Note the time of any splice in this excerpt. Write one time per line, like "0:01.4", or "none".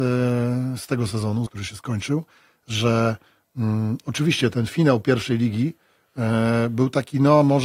0:01.5